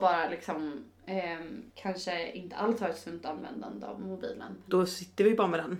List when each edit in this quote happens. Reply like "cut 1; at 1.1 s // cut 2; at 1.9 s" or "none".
cut 1; at 1.7 s // cut 2; at 4.7 s

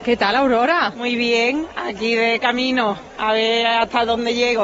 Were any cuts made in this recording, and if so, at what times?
none

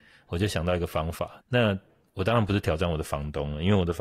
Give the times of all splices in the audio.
cut 1; at 1.4 s

